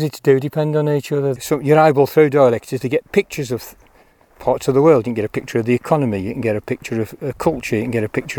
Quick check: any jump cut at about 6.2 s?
no; 1 cut; at 1.4 s

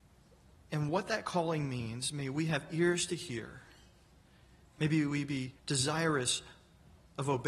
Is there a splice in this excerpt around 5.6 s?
yes; 1 cut; at 5.6 s

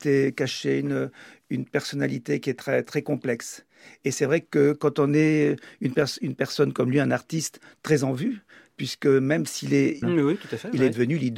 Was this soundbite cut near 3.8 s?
no; 1 cut; at 10.0 s

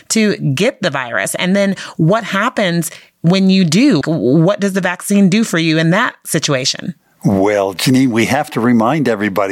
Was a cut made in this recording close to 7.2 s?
no; 1 cut; at 4.0 s

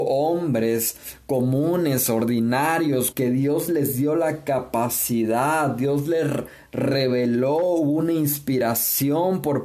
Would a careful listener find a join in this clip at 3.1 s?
yes; 1 cut; at 3.1 s

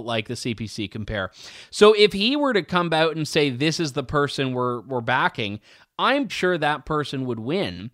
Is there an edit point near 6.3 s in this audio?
yes; 1 cut; at 6.3 s

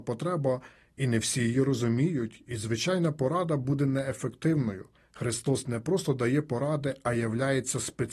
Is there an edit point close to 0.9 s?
no; 1 cut; at 5.0 s

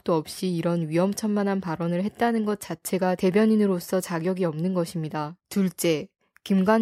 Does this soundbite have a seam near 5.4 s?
yes; 1 cut; at 5.4 s

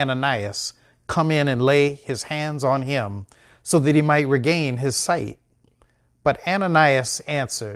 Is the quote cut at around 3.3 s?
no; 0 cuts

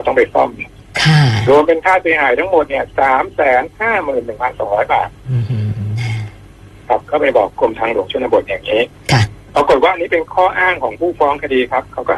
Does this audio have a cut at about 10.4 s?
no; 0 cuts

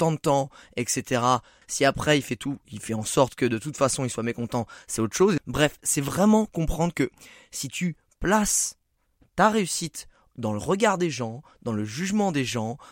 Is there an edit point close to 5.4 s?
yes; 2 cuts; at 1.6 s, 5.4 s

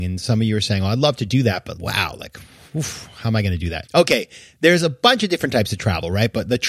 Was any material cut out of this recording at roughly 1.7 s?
yes; 2 cuts; at 1.7 s, 3.8 s

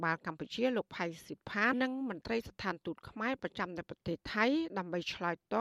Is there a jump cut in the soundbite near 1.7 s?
yes; 1 cut; at 1.7 s

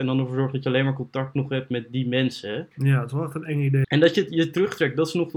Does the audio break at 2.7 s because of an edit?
yes; 2 cuts; at 2.7 s, 3.8 s

